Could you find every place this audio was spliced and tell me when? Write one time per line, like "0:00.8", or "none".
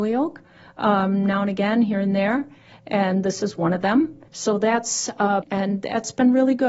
0:04.3
0:05.4